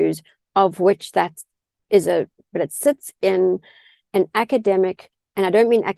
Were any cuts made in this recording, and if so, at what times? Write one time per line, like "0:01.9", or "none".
0:02.5